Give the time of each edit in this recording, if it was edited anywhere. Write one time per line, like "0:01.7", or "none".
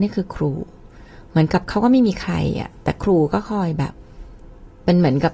none